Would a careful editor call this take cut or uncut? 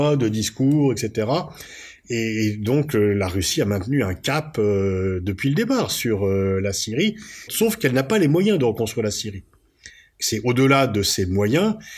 cut